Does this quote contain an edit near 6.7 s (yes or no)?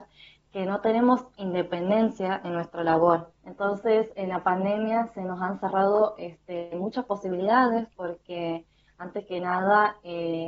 no